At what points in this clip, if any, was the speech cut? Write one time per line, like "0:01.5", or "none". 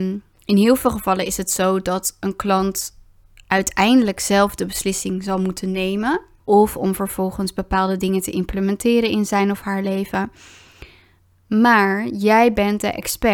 0:06.4